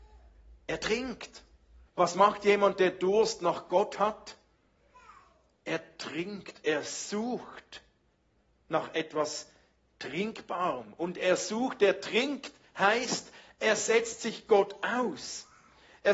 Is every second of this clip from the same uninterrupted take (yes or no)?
no